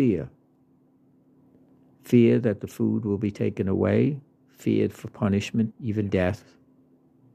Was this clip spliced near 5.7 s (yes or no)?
yes